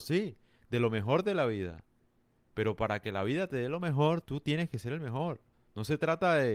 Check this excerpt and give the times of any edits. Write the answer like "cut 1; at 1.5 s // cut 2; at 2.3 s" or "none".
cut 1; at 5.5 s